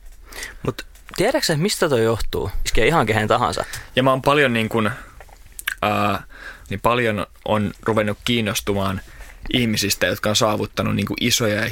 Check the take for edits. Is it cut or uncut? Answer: cut